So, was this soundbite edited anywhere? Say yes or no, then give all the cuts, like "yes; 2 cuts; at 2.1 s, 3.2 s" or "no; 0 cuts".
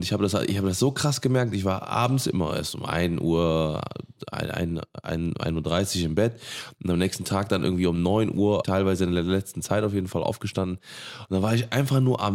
yes; 1 cut; at 8.6 s